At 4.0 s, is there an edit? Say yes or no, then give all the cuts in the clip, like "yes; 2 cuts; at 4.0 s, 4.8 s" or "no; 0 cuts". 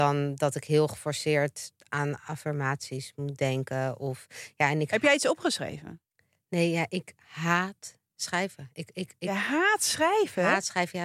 no; 0 cuts